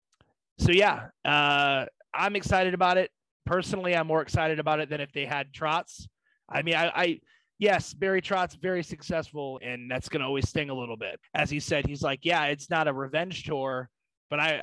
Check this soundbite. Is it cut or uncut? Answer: cut